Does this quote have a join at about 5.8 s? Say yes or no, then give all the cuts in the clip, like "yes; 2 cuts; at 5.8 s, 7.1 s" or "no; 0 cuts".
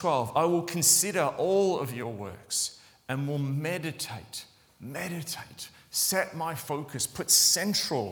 no; 0 cuts